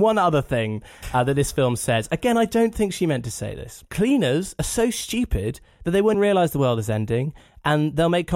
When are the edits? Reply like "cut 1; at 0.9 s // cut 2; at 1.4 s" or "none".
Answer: cut 1; at 3.8 s // cut 2; at 6.1 s